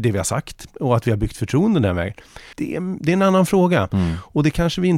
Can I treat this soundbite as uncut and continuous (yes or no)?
no